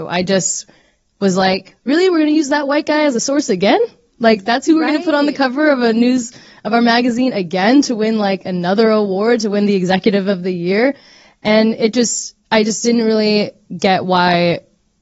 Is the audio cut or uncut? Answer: uncut